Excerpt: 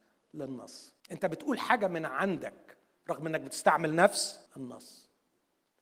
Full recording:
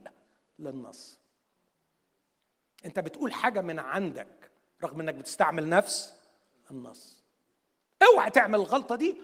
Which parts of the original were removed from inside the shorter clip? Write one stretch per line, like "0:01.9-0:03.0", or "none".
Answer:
0:01.3-0:02.7
0:06.2-0:06.6